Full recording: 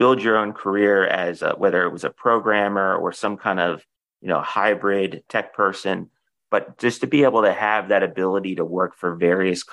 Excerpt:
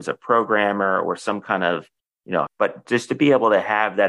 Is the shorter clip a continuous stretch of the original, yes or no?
no